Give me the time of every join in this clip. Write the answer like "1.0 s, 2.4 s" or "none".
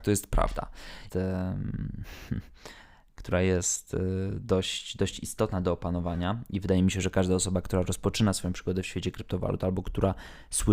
1.1 s